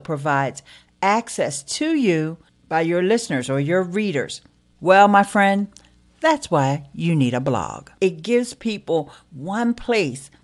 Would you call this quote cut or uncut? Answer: cut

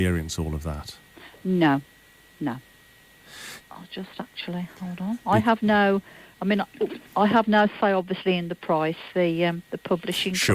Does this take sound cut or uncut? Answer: cut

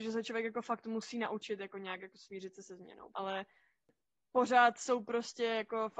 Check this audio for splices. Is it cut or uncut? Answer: cut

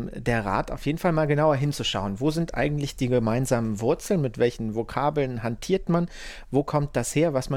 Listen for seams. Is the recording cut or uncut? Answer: uncut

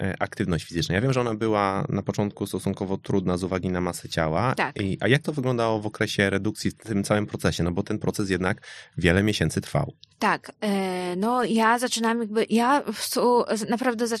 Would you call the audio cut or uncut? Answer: uncut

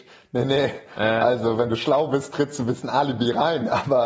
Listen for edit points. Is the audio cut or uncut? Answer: uncut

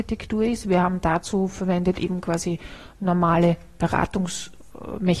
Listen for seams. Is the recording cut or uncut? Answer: uncut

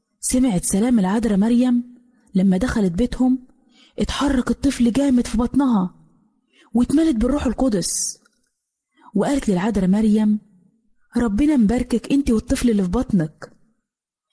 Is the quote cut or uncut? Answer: uncut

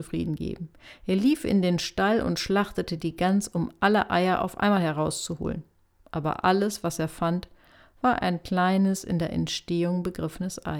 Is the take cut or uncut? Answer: uncut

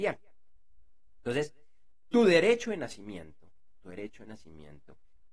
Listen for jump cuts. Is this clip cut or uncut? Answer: uncut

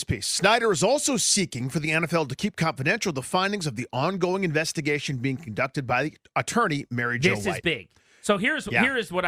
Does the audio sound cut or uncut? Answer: uncut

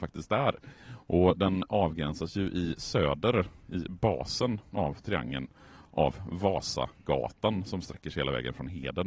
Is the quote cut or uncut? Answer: uncut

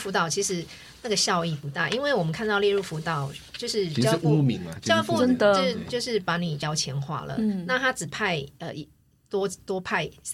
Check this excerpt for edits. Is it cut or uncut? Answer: uncut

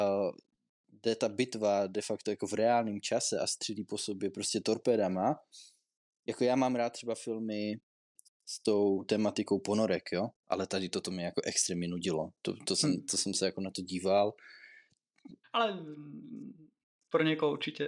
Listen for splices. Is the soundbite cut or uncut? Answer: cut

